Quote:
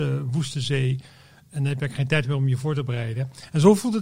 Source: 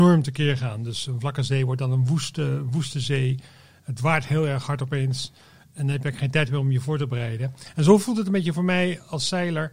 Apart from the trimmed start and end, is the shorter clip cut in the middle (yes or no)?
yes